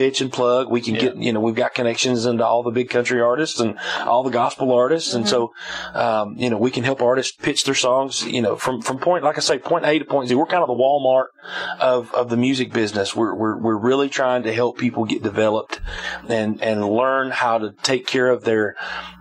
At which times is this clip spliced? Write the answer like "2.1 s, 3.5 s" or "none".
none